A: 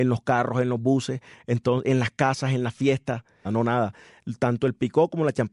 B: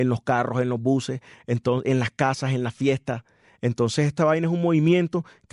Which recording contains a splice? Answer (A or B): A